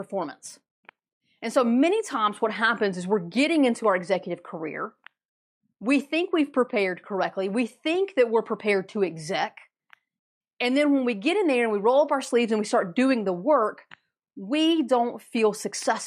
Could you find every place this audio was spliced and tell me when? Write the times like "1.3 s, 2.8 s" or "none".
none